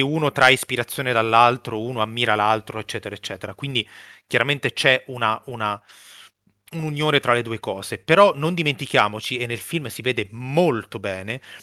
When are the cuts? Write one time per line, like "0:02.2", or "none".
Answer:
none